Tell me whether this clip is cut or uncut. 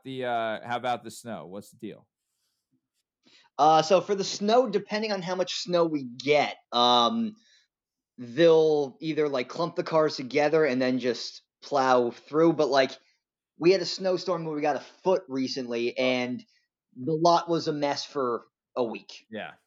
uncut